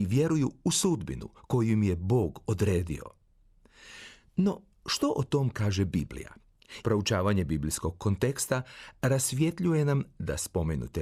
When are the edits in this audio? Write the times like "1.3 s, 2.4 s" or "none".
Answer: 6.8 s